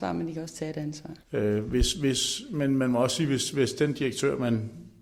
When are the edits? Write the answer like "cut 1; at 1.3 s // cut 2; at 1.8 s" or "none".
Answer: cut 1; at 1.2 s